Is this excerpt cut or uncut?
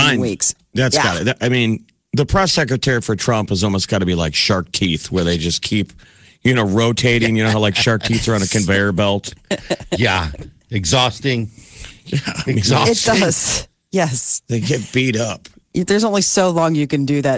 uncut